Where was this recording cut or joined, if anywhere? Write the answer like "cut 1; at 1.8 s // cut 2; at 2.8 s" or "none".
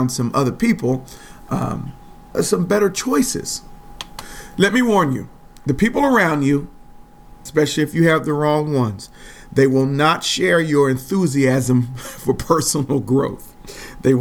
cut 1; at 2.3 s // cut 2; at 7.5 s